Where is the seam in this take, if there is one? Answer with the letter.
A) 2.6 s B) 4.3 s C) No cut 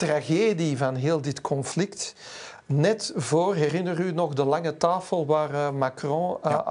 C